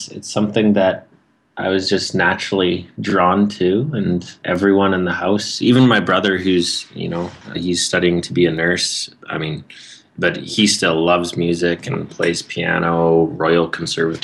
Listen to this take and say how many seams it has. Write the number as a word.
one